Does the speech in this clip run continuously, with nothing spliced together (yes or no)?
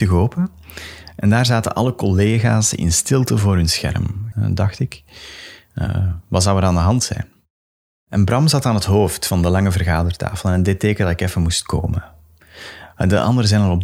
no